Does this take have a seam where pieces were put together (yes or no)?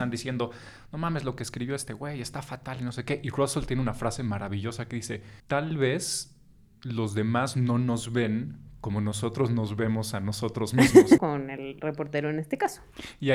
yes